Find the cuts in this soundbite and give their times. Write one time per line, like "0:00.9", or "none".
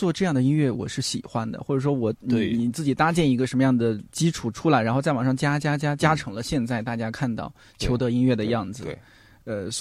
none